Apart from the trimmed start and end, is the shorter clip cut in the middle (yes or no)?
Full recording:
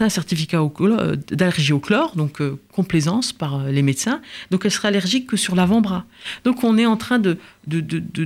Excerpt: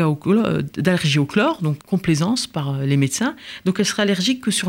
yes